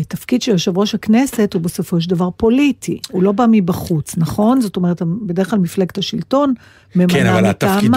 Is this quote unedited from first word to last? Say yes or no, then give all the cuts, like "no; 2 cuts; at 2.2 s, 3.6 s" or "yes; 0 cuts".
yes; 0 cuts